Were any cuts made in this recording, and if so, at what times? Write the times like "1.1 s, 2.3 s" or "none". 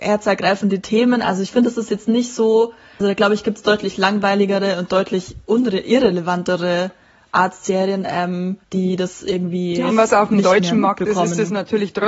3.0 s, 8.6 s, 9.9 s